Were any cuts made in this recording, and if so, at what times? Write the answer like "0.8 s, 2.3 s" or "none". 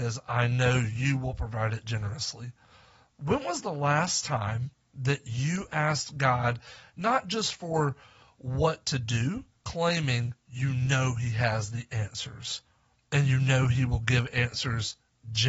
9.6 s